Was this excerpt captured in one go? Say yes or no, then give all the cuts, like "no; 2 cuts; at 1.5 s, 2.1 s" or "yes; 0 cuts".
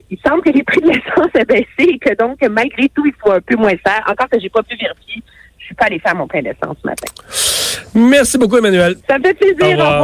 no; 1 cut; at 9.0 s